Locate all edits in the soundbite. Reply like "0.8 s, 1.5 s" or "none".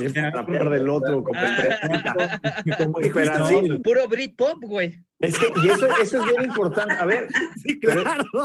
3.8 s